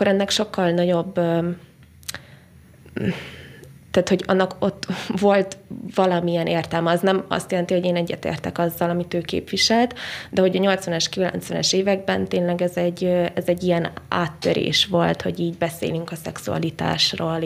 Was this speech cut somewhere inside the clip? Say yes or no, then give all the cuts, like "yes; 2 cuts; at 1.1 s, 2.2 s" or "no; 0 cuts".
no; 0 cuts